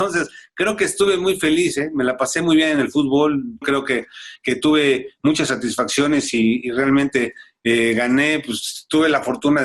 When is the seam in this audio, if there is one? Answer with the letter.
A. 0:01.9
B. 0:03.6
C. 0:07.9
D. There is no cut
B